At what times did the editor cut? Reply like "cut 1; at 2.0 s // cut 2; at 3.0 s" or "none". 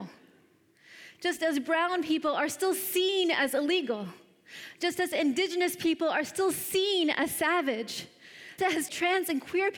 cut 1; at 8.6 s